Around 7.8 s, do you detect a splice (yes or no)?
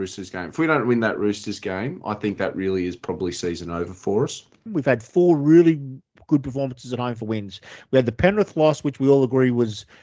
no